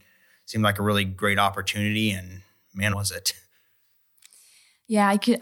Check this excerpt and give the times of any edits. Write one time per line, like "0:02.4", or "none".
0:02.9